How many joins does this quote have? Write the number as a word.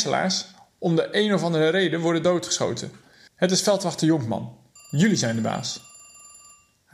two